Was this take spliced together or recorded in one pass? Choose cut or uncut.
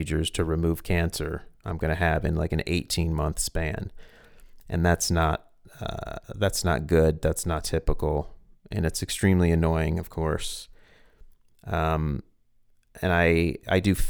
uncut